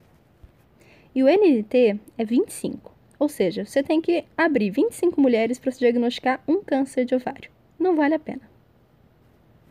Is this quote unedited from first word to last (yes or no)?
yes